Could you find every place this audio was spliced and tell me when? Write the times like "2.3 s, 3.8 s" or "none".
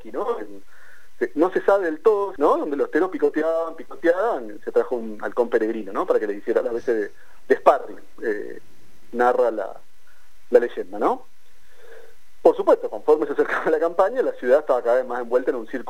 2.4 s

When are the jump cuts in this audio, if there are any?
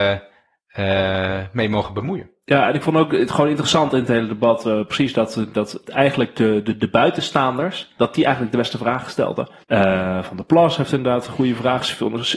9.6 s

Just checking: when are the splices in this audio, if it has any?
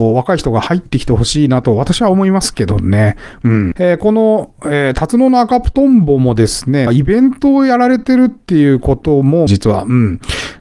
3.7 s, 6.9 s, 9.5 s

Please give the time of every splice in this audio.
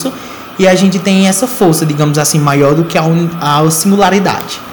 none

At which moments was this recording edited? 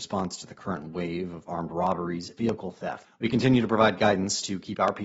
3.0 s

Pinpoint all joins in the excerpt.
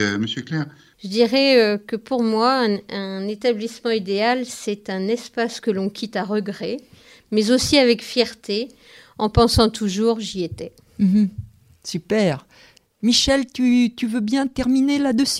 0.9 s

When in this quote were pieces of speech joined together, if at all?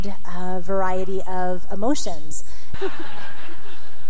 2.7 s

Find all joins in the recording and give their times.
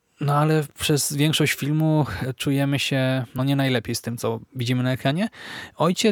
none

